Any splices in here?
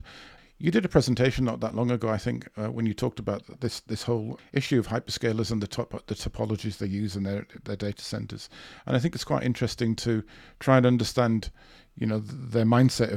no; 0 cuts

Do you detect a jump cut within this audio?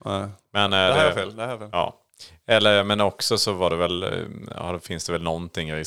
no; 0 cuts

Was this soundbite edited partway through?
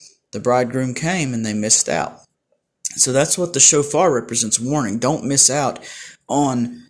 no; 0 cuts

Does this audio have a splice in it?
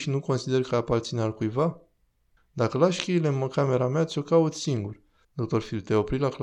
yes; 2 cuts; at 2.4 s, 5.2 s

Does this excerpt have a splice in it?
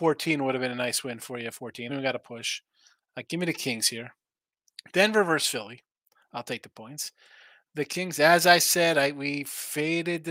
yes; 2 cuts; at 1.9 s, 4.7 s

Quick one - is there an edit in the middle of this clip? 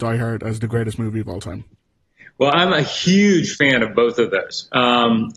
no; 0 cuts

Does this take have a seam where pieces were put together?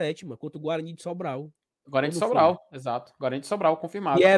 no; 0 cuts

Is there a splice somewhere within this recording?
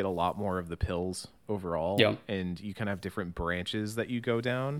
no; 0 cuts

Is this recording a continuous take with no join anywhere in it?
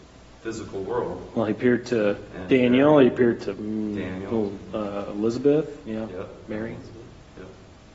yes; 0 cuts

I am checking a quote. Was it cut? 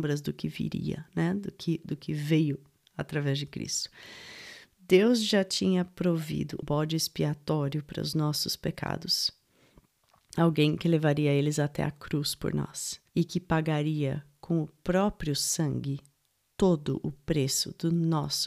yes; 2 cuts; at 6.6 s, 13.1 s

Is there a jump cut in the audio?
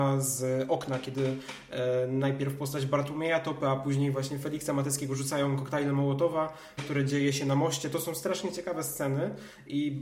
yes; 1 cut; at 6.8 s

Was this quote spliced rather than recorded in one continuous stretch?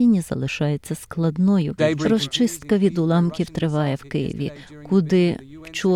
yes; 1 cut; at 1.8 s

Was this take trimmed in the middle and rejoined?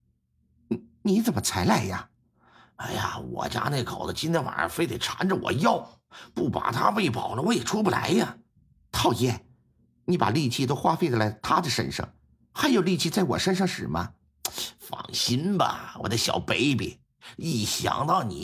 no; 0 cuts

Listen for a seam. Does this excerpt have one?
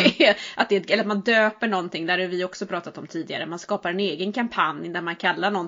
no; 0 cuts

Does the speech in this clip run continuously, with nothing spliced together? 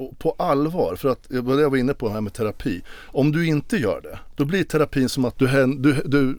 no; 1 cut; at 5.4 s

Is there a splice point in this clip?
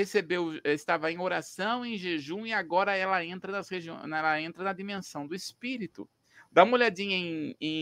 no; 0 cuts

